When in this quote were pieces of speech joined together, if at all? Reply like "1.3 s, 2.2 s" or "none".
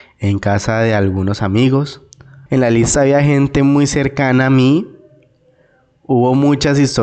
2.5 s